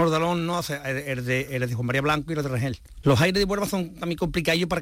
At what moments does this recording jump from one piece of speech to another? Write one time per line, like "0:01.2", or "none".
0:03.0